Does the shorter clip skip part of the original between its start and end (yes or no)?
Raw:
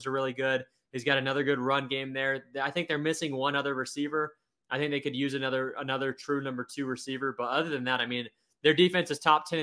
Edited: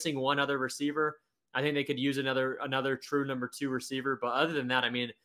no